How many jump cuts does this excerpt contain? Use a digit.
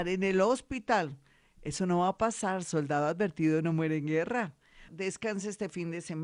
1